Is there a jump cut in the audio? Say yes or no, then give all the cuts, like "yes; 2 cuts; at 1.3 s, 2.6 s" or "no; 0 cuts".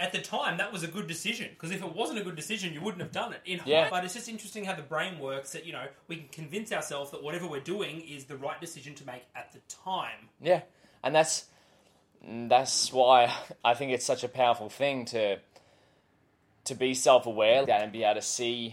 yes; 2 cuts; at 3.9 s, 17.6 s